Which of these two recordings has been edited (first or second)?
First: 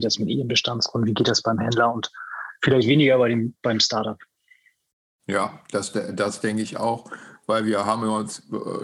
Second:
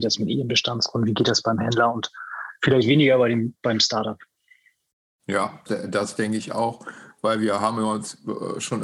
second